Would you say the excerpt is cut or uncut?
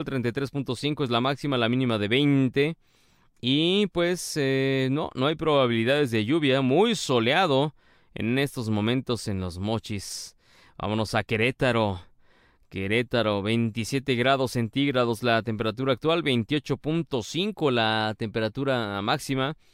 uncut